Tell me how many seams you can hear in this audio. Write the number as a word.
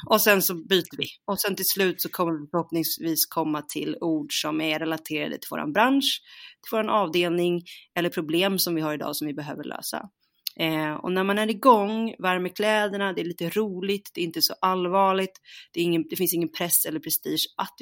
zero